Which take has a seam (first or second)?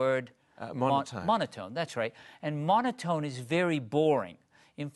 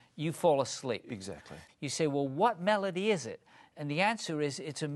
second